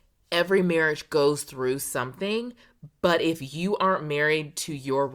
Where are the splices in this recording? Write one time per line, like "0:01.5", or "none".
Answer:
none